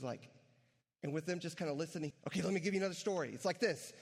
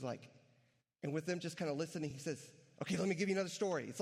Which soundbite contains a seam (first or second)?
first